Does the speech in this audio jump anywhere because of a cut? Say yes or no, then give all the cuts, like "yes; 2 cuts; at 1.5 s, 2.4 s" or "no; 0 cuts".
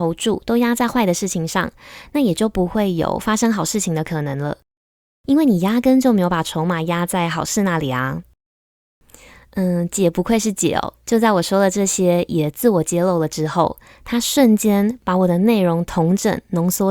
no; 0 cuts